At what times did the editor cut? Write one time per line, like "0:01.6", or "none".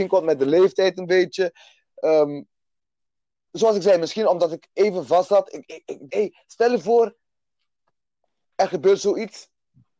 0:06.1